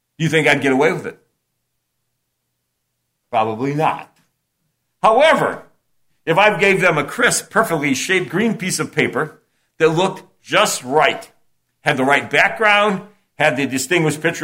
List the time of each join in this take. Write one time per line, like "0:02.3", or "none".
none